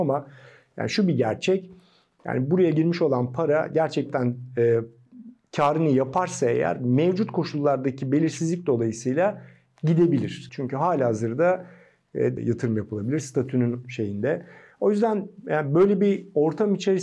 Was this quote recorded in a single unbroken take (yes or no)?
no